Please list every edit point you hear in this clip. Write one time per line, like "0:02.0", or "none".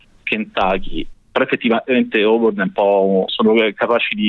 0:01.1
0:03.3